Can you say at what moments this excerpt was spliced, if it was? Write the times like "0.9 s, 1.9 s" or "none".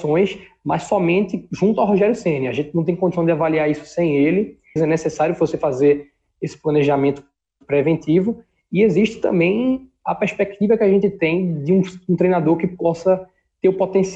4.8 s